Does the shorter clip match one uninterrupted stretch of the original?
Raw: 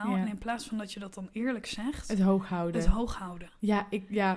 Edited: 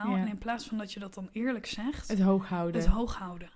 yes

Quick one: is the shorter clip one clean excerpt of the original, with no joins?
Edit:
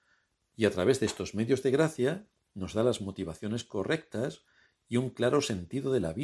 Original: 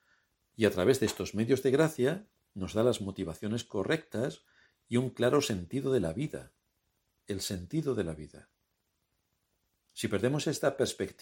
yes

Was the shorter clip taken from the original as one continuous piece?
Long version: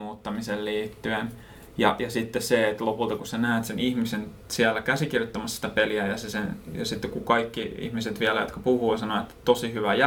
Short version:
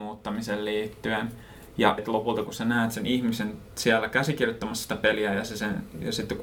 no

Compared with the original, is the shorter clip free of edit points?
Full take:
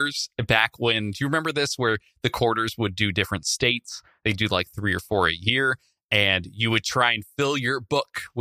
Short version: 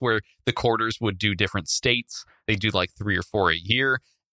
yes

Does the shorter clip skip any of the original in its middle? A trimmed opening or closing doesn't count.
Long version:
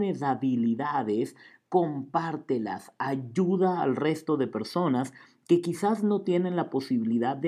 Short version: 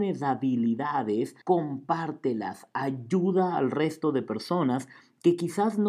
yes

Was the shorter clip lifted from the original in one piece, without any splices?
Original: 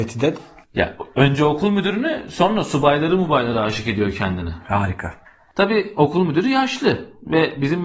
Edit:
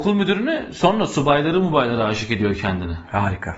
yes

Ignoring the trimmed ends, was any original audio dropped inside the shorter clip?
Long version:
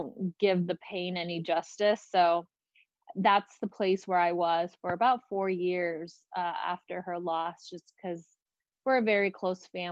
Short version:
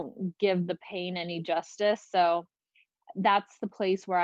no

